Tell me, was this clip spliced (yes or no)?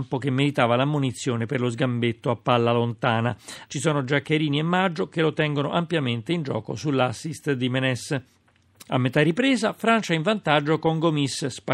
yes